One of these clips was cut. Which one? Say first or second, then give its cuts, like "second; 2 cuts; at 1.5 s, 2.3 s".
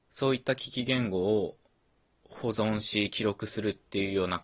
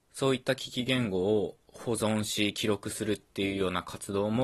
second; 1 cut; at 1.6 s